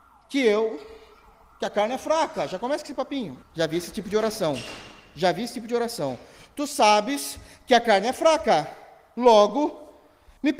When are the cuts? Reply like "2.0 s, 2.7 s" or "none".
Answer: 3.4 s